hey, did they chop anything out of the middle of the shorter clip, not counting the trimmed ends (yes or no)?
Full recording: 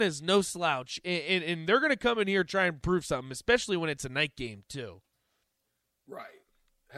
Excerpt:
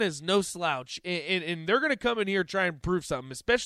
no